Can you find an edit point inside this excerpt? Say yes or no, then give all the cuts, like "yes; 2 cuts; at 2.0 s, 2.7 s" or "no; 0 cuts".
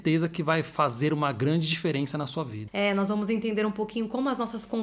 yes; 1 cut; at 2.7 s